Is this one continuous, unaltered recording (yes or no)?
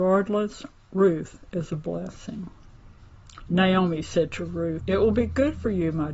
no